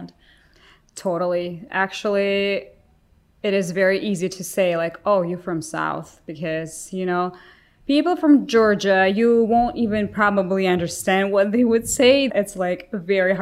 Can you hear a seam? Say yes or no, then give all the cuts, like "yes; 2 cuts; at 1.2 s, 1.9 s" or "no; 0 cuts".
yes; 1 cut; at 12.3 s